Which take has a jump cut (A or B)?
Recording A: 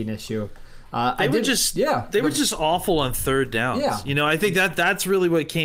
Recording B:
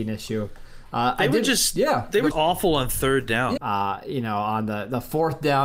B